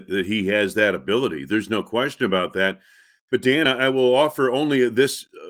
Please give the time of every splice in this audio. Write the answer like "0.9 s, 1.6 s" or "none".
none